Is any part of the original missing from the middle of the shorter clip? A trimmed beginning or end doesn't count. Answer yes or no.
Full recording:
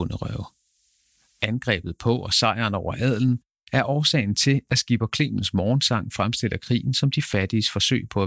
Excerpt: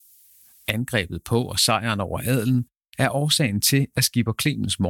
no